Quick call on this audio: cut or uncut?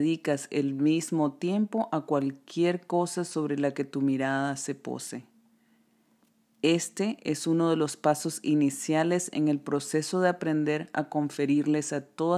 uncut